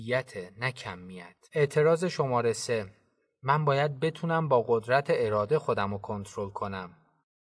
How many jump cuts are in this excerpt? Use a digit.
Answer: 1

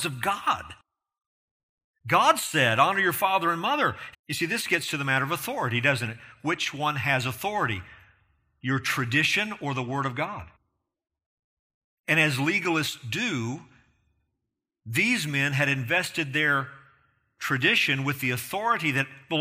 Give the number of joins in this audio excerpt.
1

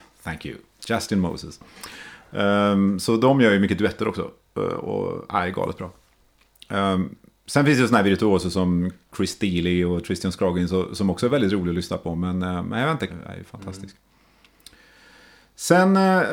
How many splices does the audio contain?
1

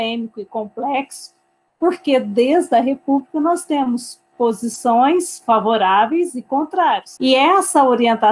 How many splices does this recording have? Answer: 1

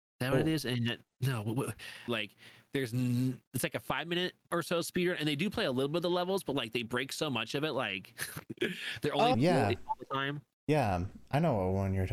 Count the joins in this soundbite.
2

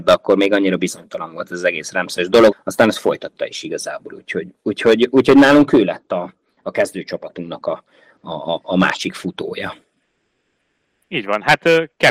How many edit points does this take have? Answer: 1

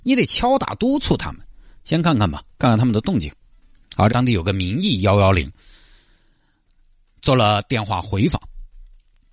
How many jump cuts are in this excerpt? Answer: 1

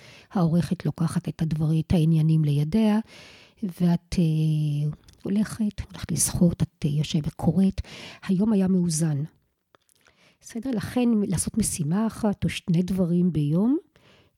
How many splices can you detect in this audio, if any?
1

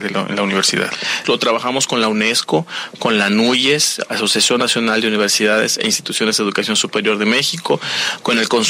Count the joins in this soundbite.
1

